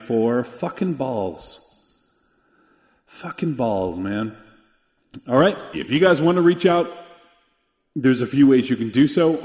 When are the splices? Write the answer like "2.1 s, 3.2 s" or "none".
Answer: 5.7 s